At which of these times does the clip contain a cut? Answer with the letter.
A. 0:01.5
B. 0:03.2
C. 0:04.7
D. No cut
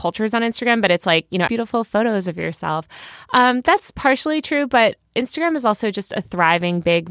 A